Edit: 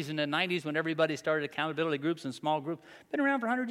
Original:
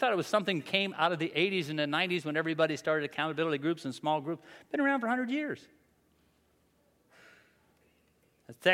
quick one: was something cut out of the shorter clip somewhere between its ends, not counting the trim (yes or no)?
no